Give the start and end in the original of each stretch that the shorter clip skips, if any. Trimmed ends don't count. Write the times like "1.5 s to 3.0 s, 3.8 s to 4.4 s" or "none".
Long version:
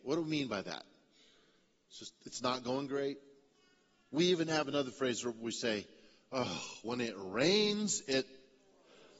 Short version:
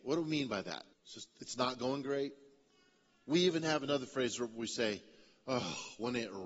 0.9 s to 1.8 s